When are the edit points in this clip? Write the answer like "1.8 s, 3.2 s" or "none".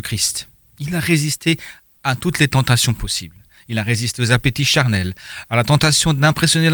none